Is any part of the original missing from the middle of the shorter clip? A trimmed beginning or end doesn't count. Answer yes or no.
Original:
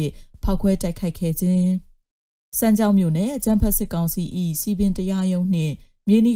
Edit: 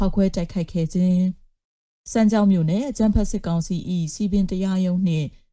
no